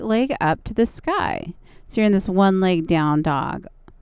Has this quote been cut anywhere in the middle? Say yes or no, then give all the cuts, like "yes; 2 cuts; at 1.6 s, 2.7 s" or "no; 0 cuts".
no; 0 cuts